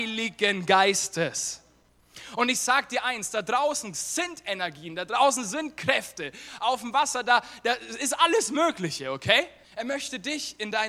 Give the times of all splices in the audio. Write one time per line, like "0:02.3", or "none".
0:09.6